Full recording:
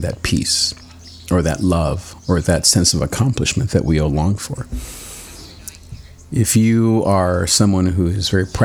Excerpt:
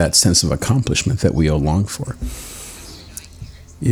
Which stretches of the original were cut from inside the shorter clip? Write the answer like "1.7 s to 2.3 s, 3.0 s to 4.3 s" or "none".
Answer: none